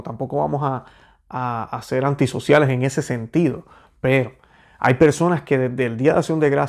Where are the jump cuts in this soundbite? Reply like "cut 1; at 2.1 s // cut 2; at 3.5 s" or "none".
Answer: none